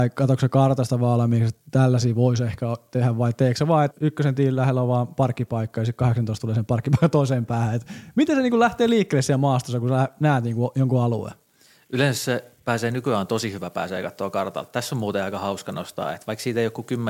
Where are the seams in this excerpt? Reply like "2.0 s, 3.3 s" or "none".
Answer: 3.9 s